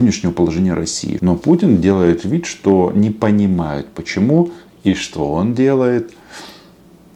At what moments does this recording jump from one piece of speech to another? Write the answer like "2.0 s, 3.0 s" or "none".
1.2 s